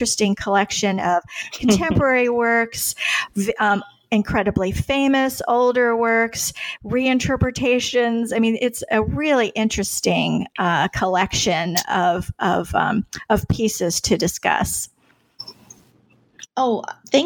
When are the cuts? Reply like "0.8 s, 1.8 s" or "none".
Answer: none